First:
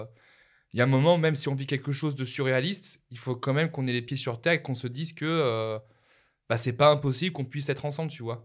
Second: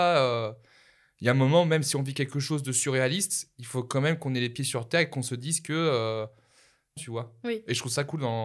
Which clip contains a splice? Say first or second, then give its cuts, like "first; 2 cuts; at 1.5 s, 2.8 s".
second; 1 cut; at 7.0 s